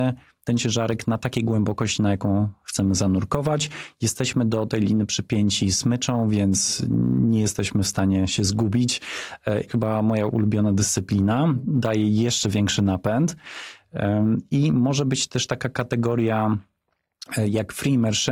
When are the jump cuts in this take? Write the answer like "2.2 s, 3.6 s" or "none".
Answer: 9.7 s, 11.6 s